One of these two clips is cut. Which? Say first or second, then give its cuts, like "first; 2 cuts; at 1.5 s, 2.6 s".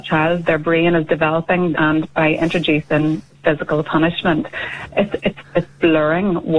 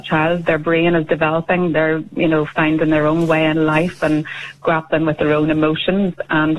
first; 1 cut; at 1.7 s